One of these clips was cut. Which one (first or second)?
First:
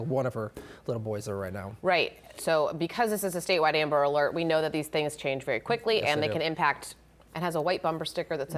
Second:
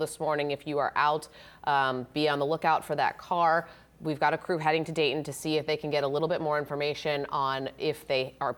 first